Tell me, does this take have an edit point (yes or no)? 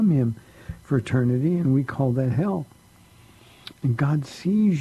yes